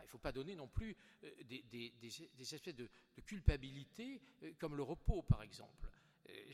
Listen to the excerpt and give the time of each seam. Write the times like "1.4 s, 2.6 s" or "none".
none